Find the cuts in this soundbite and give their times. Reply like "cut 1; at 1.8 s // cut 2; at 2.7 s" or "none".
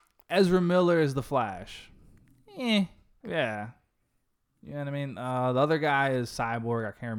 cut 1; at 3.2 s